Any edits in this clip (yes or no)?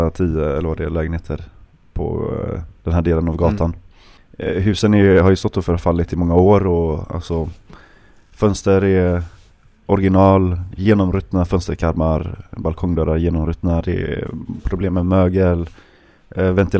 no